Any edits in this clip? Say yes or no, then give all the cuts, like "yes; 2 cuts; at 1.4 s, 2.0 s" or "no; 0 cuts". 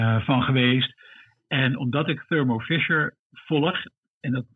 no; 0 cuts